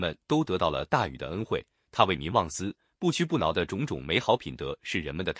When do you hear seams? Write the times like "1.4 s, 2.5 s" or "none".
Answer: none